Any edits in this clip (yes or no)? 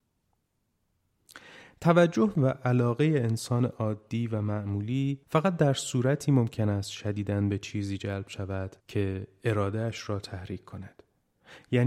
yes